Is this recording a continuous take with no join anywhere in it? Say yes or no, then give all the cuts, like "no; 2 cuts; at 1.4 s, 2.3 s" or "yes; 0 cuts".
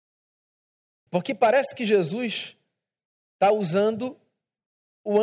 no; 1 cut; at 1.1 s